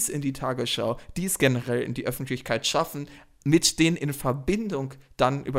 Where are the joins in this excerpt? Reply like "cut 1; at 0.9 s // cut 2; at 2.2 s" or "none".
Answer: none